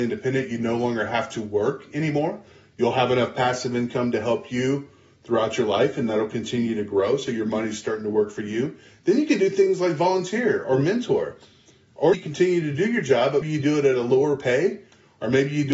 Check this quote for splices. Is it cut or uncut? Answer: cut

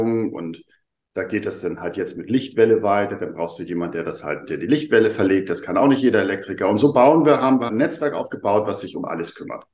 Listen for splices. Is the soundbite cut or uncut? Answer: cut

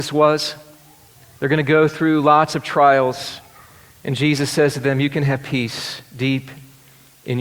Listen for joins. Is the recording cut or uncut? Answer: uncut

